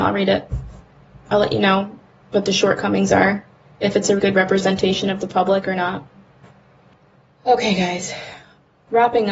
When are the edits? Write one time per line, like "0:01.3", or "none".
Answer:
0:04.2